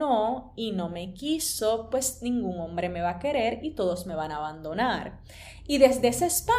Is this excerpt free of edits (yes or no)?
yes